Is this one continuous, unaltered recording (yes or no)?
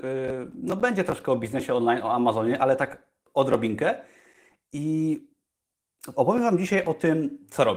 yes